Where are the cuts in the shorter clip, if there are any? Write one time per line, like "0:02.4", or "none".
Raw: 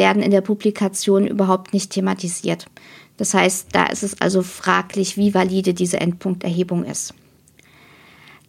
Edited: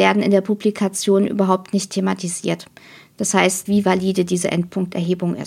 0:03.7